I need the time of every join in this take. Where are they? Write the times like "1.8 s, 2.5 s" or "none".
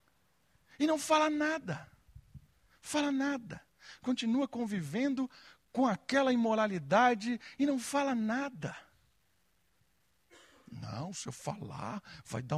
none